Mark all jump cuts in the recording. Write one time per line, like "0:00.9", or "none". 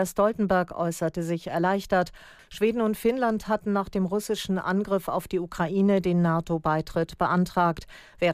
0:02.4